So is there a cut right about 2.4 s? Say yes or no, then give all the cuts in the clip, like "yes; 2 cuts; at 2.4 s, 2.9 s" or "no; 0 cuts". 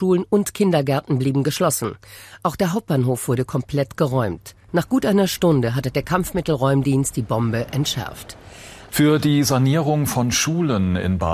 no; 2 cuts; at 4.7 s, 8.9 s